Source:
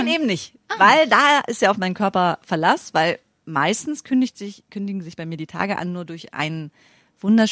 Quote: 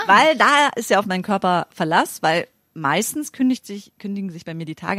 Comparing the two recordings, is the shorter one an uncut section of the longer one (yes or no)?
yes